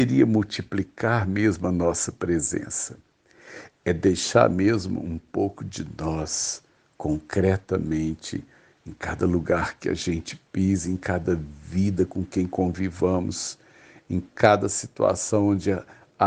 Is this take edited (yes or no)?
no